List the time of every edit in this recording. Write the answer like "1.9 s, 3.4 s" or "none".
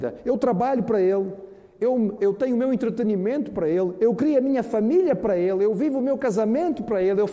2.2 s